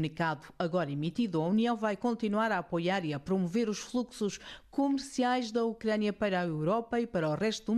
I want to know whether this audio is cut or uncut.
uncut